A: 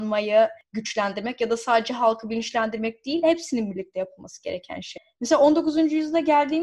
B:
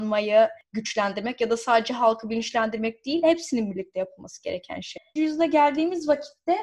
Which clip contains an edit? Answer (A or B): B